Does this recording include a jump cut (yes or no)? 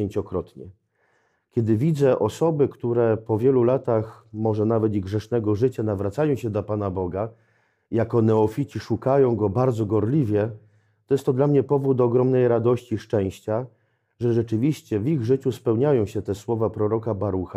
no